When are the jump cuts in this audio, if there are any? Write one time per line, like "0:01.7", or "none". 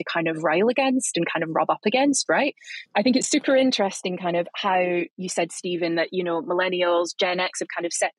0:02.9